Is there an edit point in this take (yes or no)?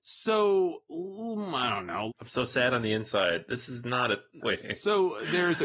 yes